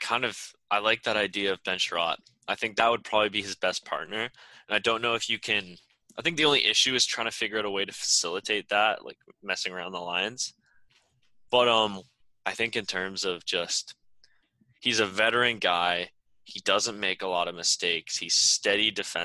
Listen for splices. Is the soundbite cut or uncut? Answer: uncut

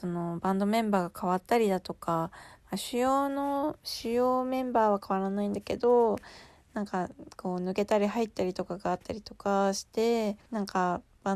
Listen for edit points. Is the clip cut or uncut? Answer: cut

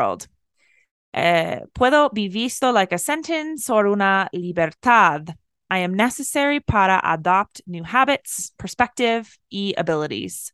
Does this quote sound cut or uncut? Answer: uncut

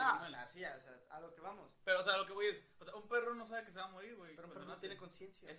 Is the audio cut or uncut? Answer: uncut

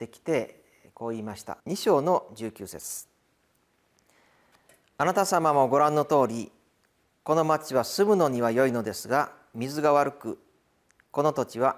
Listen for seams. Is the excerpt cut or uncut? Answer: cut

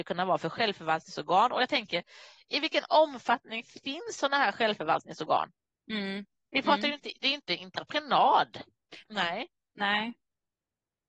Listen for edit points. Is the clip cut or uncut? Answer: cut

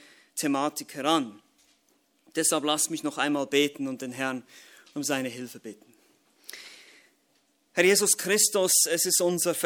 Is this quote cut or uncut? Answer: uncut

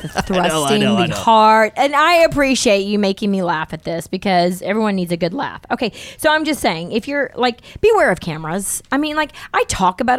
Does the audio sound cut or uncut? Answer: uncut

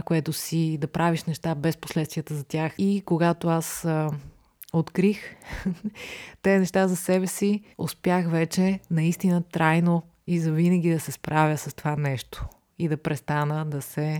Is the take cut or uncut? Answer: cut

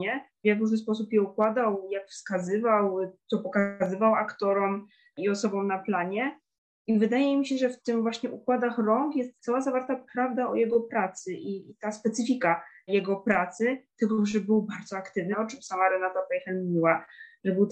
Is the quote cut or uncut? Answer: cut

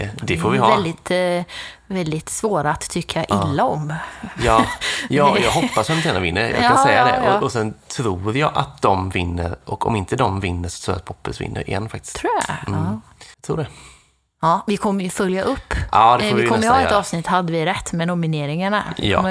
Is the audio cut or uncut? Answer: cut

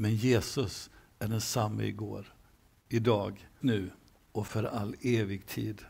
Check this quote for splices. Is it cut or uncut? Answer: cut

